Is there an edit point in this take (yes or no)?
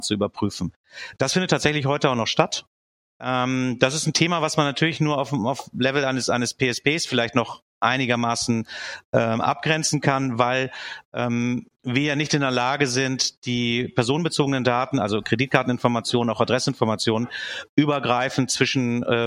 no